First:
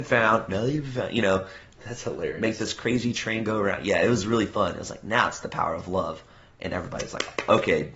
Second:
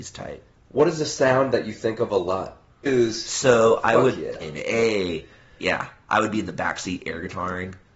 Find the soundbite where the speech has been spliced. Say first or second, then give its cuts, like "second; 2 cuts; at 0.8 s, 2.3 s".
second; 2 cuts; at 2.9 s, 4.4 s